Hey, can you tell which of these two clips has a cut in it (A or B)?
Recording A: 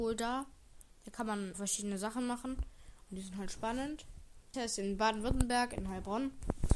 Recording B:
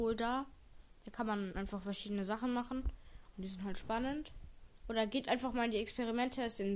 A